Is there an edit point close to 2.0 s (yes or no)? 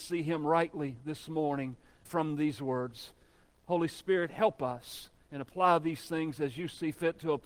yes